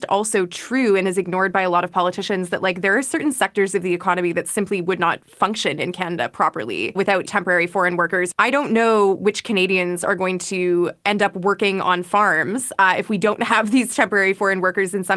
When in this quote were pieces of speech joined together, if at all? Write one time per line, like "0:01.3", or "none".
none

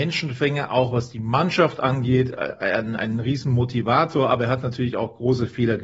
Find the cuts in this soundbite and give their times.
none

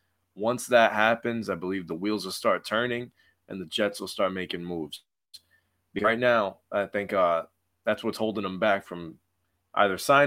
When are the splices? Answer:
none

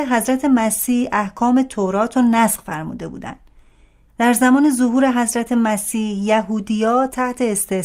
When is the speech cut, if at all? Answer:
0:04.1

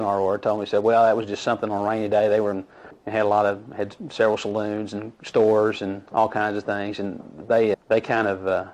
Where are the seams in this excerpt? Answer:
0:02.9
0:07.7

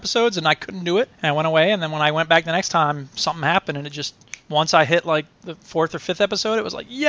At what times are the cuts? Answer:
0:01.1

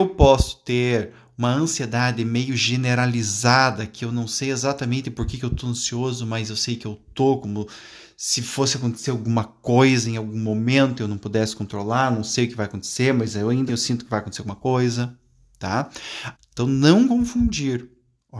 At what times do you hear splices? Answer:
0:13.7
0:16.3

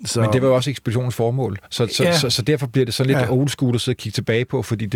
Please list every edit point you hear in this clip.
none

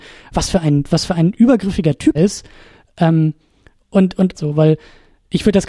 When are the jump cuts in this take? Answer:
0:02.1
0:04.3

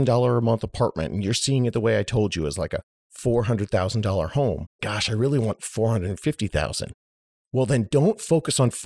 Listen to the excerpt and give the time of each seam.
0:04.8

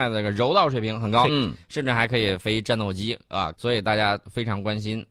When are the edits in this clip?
0:01.3
0:03.5

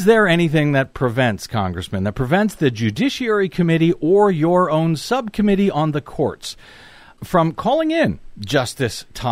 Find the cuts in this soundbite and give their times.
none

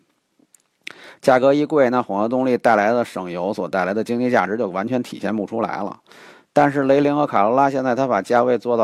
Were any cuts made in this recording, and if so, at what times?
none

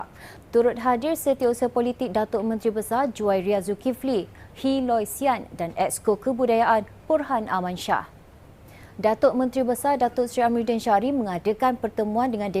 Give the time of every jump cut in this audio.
0:04.3
0:08.9

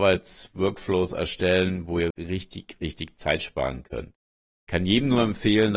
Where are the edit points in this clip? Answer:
0:02.1

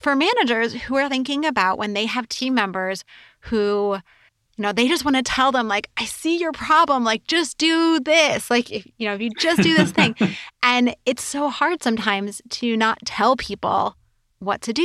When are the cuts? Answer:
none

